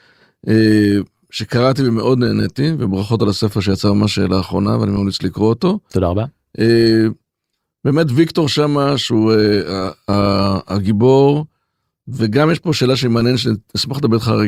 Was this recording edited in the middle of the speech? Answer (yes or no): no